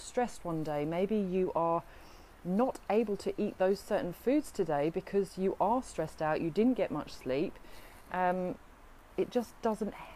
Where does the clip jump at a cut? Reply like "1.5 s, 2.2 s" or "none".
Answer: none